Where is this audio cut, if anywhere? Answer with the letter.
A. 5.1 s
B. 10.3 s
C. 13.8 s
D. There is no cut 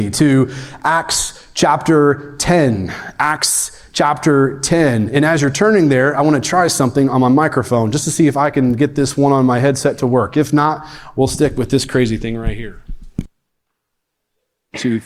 D